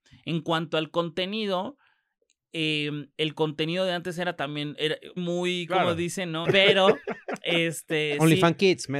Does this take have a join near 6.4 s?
yes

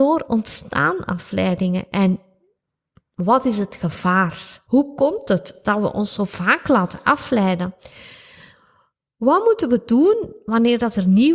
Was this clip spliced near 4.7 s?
yes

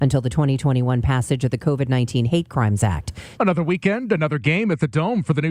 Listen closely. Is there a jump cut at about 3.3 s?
yes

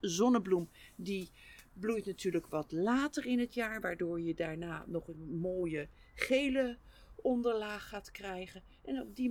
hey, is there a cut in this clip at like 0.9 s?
no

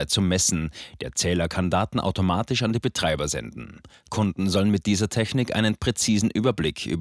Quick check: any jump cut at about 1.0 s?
no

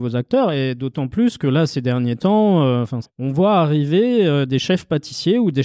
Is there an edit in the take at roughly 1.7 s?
no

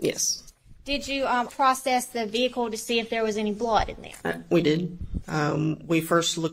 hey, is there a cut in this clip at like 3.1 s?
no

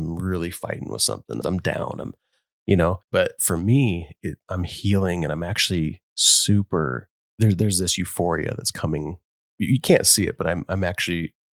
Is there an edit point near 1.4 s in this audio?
yes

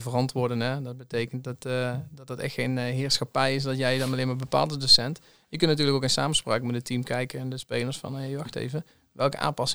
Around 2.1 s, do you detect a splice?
no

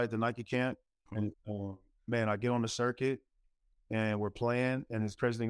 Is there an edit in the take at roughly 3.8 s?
no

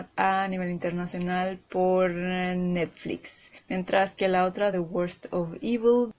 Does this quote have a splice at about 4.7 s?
no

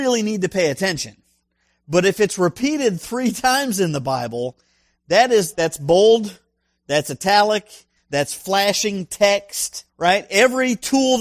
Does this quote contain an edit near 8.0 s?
yes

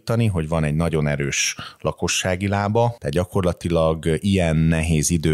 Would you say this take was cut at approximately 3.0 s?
yes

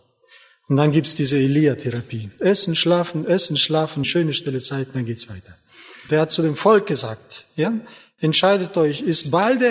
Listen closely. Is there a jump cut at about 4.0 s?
yes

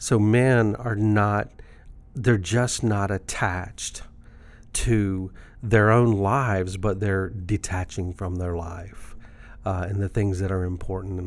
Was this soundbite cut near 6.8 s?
no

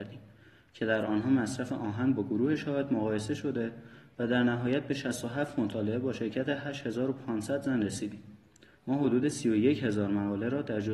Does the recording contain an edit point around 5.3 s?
no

